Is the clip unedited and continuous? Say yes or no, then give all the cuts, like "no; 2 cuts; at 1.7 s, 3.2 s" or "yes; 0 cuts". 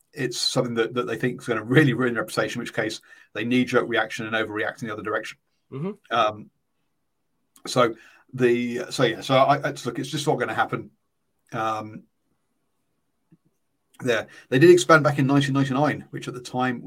yes; 0 cuts